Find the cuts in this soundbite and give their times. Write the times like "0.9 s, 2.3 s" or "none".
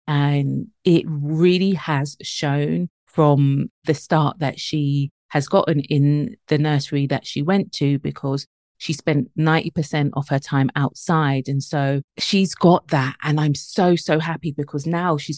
none